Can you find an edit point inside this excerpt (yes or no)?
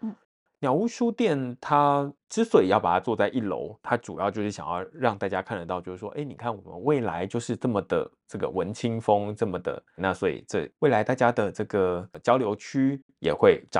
yes